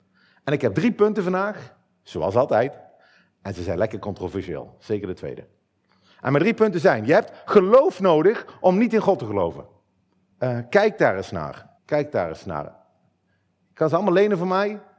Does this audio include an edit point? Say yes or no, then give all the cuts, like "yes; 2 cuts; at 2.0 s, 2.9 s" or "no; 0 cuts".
yes; 2 cuts; at 10.3 s, 11.8 s